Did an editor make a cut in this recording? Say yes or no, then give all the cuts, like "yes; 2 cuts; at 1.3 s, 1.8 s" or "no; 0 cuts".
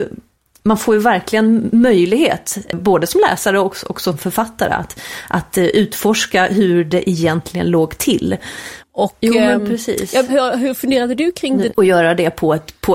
yes; 3 cuts; at 8.8 s, 10.3 s, 11.7 s